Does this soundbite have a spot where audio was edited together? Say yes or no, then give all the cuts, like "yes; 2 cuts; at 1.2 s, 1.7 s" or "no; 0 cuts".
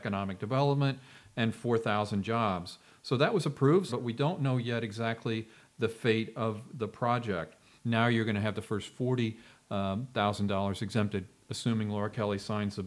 yes; 2 cuts; at 3.9 s, 7.8 s